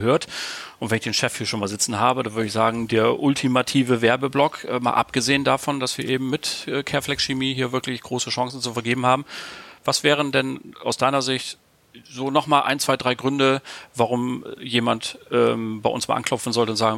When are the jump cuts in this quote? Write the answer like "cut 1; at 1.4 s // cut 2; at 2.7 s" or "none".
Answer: none

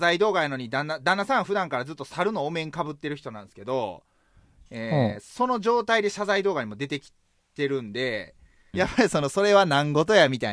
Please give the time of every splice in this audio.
cut 1; at 8.7 s

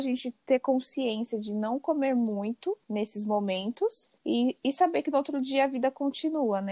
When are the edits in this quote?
cut 1; at 2.8 s // cut 2; at 4.2 s

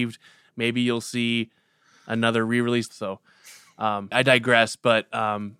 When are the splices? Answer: cut 1; at 2.9 s // cut 2; at 4.1 s

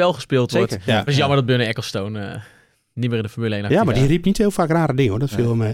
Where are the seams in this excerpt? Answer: cut 1; at 1.1 s

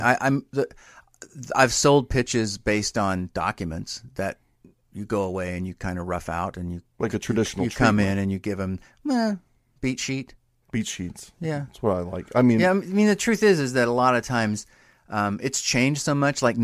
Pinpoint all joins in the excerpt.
none

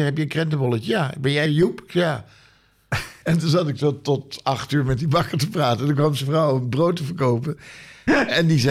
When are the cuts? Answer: cut 1; at 1.5 s // cut 2; at 3.2 s

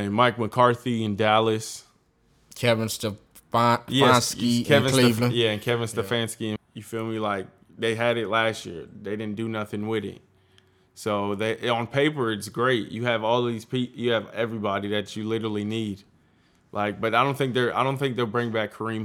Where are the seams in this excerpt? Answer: cut 1; at 6.6 s

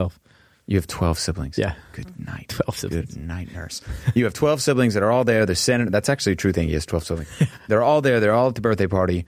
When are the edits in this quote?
none

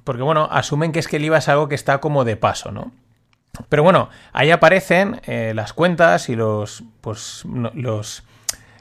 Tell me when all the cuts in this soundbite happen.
cut 1; at 3.6 s

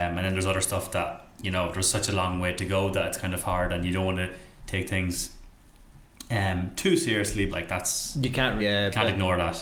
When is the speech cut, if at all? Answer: cut 1; at 7.5 s // cut 2; at 8.6 s

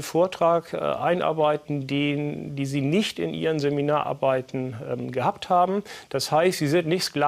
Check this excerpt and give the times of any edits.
none

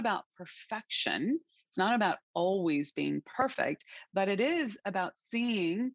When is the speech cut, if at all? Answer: none

